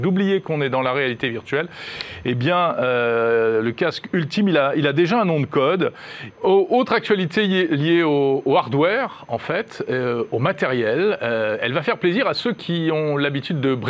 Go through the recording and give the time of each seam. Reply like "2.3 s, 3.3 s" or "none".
6.3 s